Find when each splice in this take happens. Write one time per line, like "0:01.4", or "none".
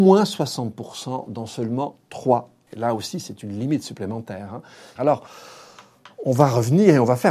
0:02.7
0:05.0